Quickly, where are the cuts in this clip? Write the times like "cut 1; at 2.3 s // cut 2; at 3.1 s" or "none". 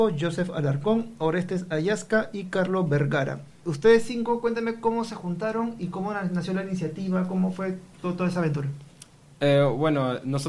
none

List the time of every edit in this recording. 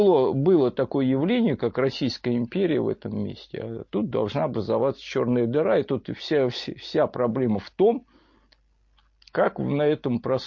none

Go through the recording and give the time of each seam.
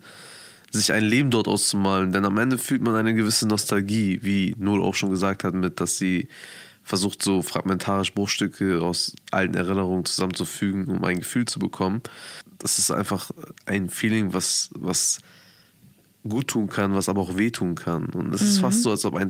none

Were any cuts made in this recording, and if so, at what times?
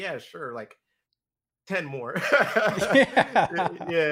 none

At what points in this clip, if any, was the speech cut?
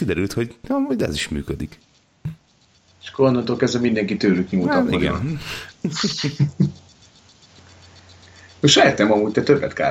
none

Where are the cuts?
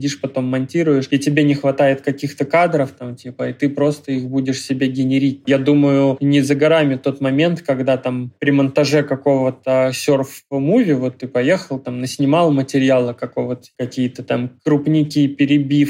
cut 1; at 5.4 s // cut 2; at 13.7 s

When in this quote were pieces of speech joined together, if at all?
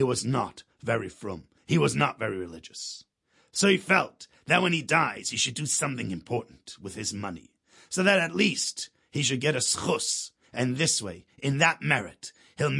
none

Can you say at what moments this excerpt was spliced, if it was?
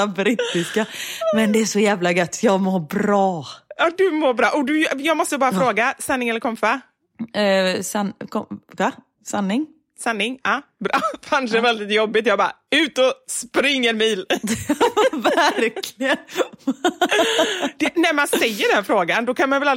none

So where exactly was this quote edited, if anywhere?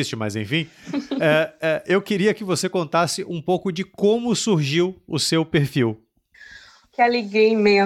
cut 1; at 6.8 s

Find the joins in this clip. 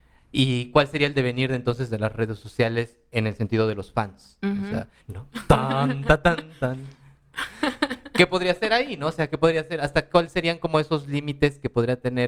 cut 1; at 5.0 s

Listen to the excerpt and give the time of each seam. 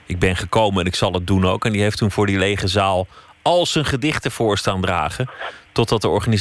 none

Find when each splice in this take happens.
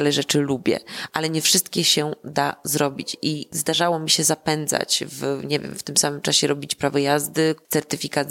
none

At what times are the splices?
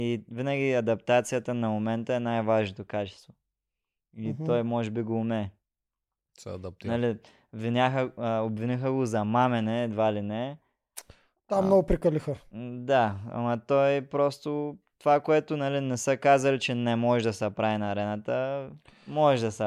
none

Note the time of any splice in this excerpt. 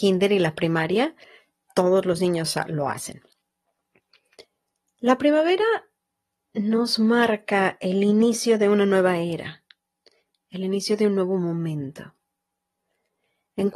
none

